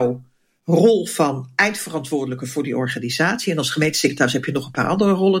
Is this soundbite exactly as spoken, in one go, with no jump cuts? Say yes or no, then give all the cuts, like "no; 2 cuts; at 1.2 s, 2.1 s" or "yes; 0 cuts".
yes; 0 cuts